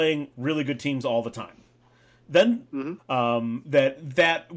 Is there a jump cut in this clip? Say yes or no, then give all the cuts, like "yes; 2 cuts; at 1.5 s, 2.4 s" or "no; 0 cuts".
yes; 1 cut; at 3.0 s